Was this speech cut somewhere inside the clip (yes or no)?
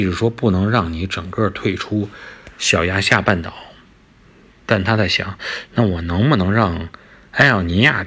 no